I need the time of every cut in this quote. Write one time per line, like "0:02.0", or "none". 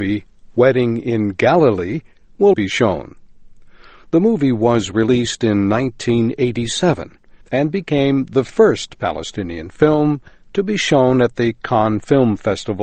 0:02.5

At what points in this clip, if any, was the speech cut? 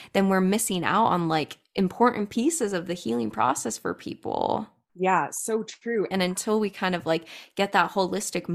0:04.9
0:06.1

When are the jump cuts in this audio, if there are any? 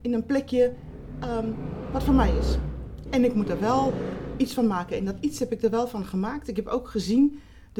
none

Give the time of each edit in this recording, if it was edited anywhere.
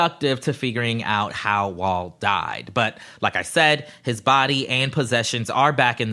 none

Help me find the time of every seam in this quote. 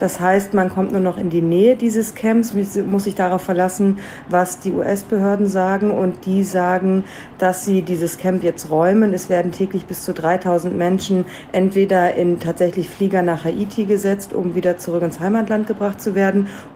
0:02.5

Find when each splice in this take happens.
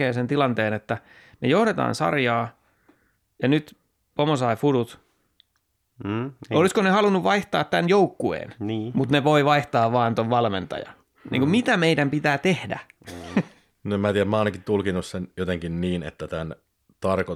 none

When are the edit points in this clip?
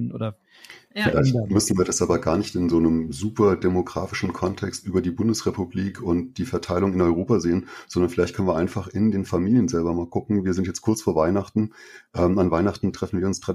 none

